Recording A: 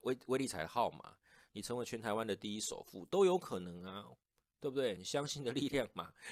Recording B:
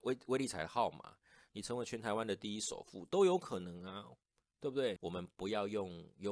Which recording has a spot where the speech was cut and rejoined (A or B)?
B